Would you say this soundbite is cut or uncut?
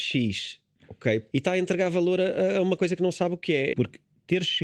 cut